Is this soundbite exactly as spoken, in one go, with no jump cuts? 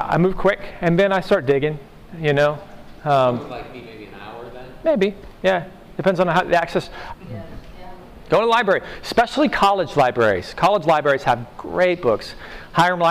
no; 1 cut; at 7.1 s

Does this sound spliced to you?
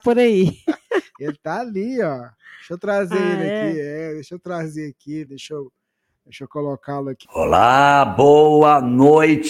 yes; 2 cuts; at 5.3 s, 7.2 s

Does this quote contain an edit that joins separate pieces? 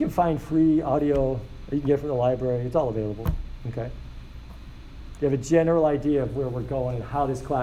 yes; 1 cut; at 5.2 s

